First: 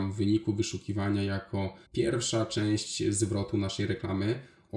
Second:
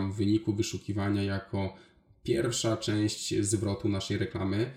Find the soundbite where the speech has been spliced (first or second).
first